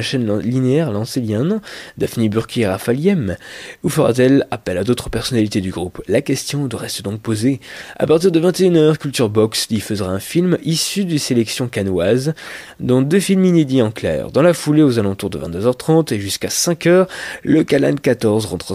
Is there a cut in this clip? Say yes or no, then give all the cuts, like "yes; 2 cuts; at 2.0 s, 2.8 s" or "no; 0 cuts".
no; 0 cuts